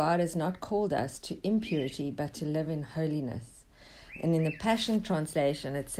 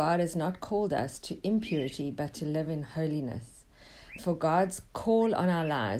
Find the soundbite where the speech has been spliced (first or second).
second